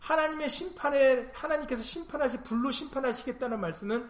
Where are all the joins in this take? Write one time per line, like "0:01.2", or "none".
none